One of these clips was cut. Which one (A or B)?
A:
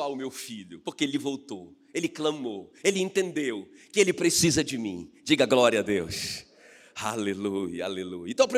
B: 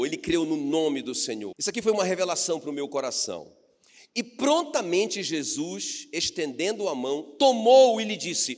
B